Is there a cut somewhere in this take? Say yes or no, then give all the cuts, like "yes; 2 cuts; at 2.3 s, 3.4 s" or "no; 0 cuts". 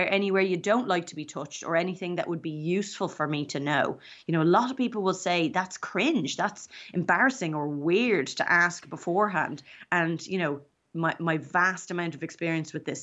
no; 0 cuts